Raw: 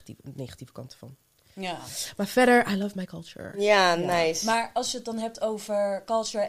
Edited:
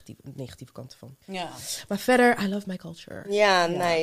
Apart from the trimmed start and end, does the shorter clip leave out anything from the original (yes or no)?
yes